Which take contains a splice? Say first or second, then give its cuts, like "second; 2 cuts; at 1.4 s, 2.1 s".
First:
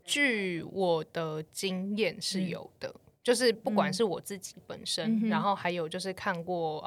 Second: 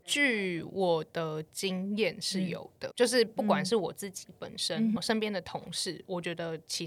second; 2 cuts; at 2.9 s, 5.0 s